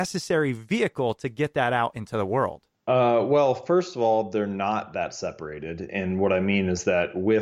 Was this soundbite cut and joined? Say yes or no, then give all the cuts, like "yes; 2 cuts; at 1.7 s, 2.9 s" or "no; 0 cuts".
no; 0 cuts